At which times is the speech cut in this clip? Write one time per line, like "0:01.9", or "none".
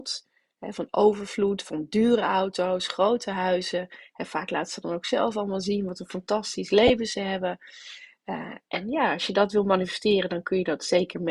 none

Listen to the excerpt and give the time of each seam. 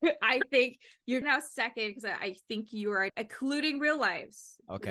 0:01.2
0:03.1

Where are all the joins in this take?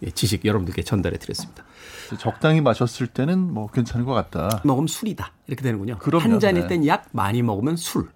0:02.1
0:04.6

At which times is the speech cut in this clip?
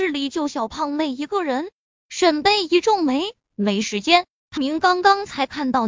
0:01.9
0:03.4
0:04.6

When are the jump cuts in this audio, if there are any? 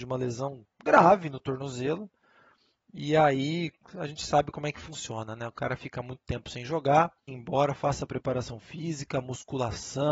0:07.3

